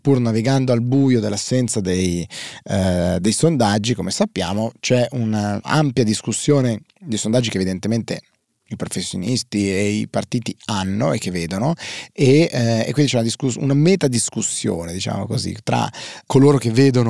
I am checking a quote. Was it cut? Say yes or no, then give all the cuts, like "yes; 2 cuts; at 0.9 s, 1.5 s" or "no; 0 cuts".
no; 0 cuts